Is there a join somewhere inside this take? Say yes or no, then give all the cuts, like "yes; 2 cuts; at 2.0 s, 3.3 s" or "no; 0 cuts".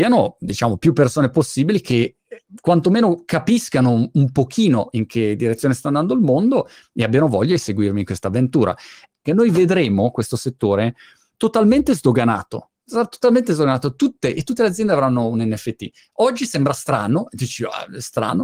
yes; 1 cut; at 9.2 s